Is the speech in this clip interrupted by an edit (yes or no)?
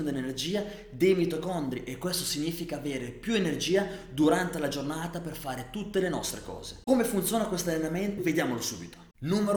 yes